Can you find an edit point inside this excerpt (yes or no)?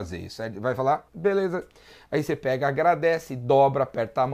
yes